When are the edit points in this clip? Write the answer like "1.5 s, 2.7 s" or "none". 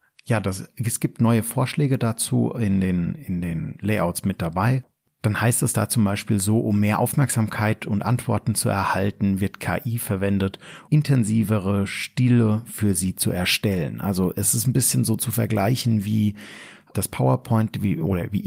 10.9 s